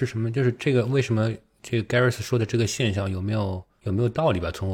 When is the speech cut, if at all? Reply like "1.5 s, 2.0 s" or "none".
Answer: none